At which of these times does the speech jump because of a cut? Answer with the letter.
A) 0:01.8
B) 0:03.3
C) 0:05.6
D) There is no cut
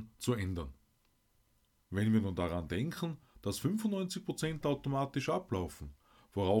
A